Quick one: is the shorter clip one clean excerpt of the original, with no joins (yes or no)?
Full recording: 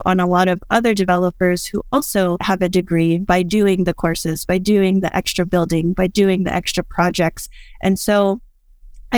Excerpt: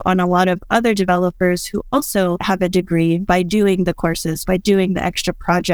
no